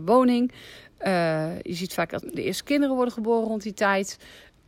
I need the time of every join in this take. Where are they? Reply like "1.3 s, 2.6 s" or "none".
2.2 s